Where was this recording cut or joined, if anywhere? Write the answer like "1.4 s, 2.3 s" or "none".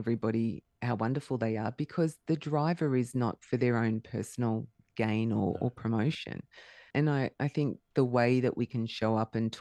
6.9 s